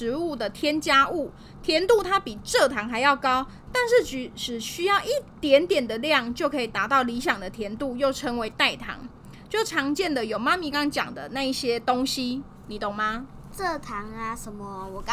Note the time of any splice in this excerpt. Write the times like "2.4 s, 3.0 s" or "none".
10.7 s

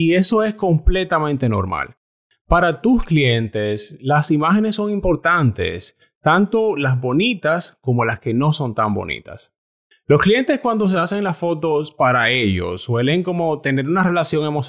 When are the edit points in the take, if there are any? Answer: none

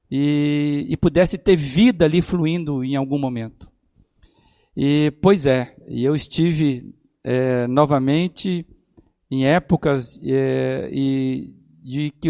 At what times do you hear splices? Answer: none

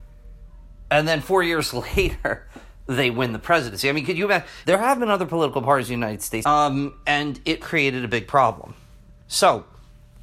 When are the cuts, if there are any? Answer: 4.6 s, 6.4 s, 7.6 s

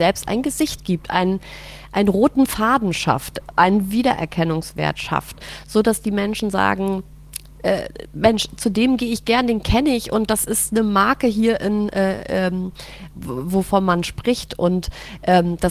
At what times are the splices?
13.1 s

